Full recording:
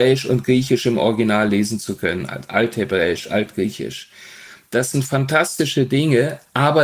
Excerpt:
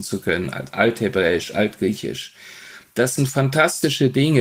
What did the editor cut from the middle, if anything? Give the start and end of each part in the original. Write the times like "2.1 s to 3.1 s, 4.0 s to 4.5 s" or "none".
none